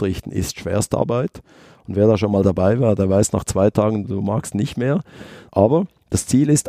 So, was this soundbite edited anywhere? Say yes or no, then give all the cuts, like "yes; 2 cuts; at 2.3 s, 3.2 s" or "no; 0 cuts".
yes; 2 cuts; at 4.0 s, 5.5 s